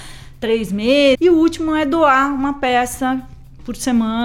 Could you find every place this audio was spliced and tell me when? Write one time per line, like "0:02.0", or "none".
0:01.2